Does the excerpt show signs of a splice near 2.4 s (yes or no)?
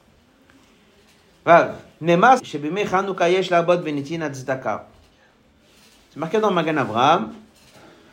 yes